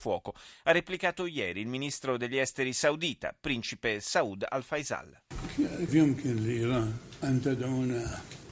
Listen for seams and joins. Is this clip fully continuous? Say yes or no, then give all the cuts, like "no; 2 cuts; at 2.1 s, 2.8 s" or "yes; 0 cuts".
no; 1 cut; at 5.9 s